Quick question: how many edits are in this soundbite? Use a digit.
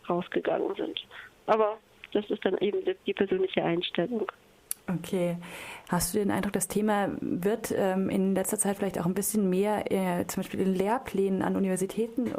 1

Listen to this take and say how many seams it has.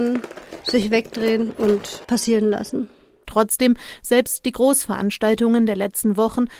1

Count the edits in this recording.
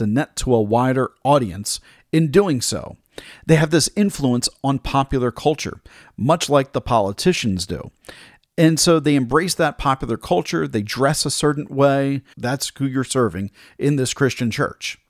1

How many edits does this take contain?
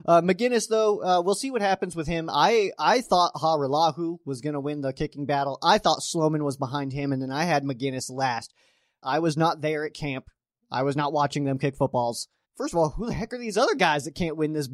2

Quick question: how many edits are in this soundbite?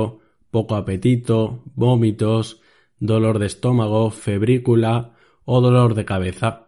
0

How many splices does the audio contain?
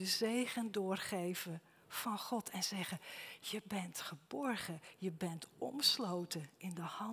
0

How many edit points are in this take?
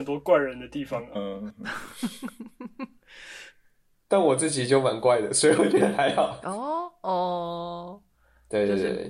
1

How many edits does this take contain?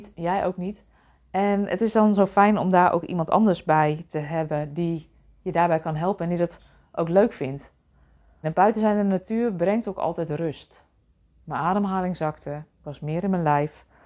1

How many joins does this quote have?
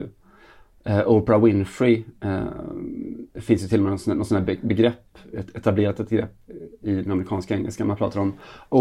1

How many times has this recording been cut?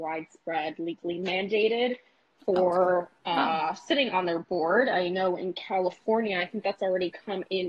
1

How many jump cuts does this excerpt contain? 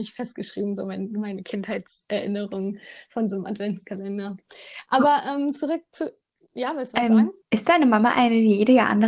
1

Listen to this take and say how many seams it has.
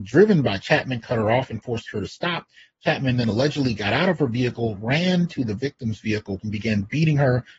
1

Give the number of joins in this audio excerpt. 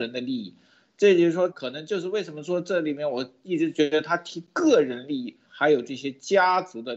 2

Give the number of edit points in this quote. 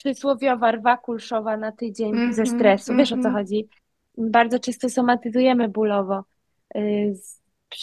0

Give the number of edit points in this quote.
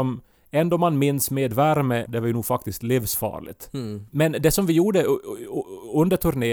1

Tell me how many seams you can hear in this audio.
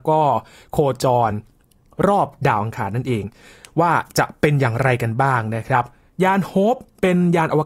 0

